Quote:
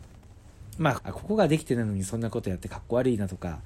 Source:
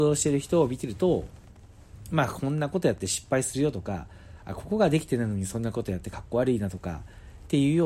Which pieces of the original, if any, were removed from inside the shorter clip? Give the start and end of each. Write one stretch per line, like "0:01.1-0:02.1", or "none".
0:02.3-0:04.4